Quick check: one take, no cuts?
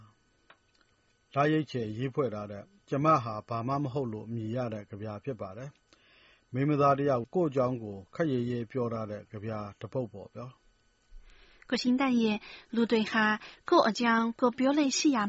no; 1 cut; at 7.2 s

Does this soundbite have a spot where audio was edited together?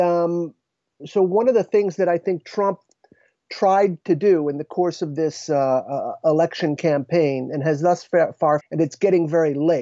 yes; 2 cuts; at 1.0 s, 8.6 s

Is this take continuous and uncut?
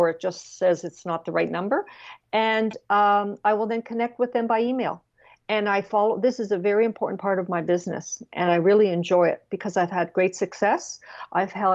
yes; 0 cuts

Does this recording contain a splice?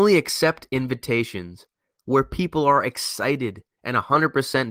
no; 0 cuts

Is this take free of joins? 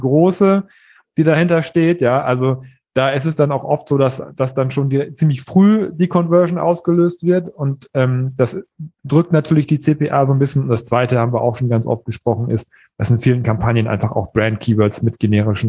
yes; 0 cuts

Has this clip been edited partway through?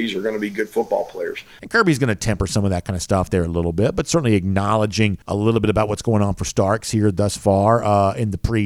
yes; 2 cuts; at 1.6 s, 5.2 s

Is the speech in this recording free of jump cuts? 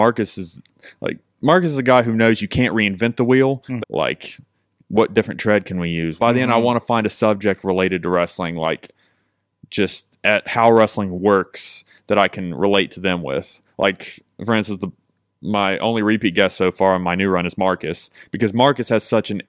no; 2 cuts; at 3.8 s, 6.2 s

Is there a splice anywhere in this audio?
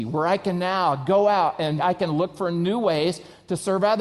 yes; 1 cut; at 1.8 s

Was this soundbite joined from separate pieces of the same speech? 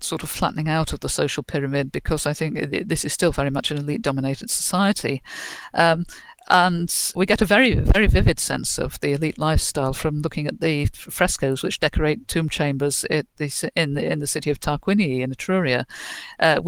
yes; 1 cut; at 7.2 s

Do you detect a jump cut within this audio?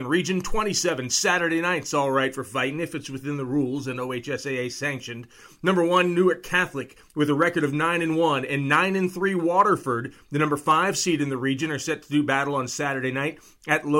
no; 0 cuts

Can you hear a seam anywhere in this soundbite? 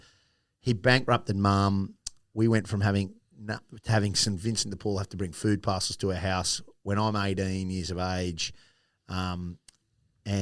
no; 0 cuts

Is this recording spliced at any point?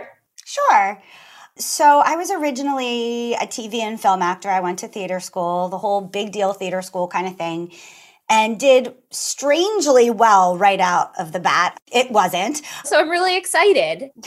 yes; 2 cuts; at 11.7 s, 12.8 s

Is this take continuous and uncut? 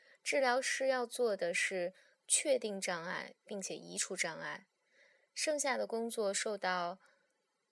yes; 0 cuts

